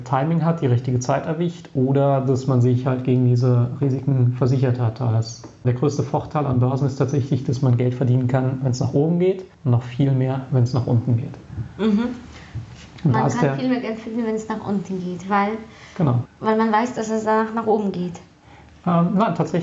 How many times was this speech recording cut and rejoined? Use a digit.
1